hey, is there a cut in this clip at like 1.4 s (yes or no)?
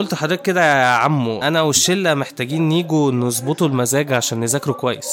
yes